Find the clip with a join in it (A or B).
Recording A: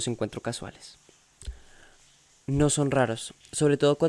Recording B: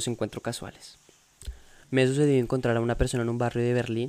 B